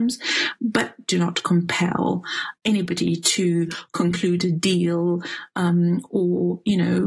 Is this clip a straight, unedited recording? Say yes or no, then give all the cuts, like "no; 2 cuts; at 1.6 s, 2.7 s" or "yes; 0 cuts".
no; 1 cut; at 2.6 s